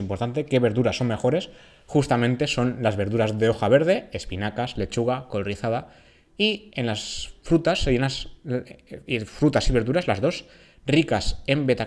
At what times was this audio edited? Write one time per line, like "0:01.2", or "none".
none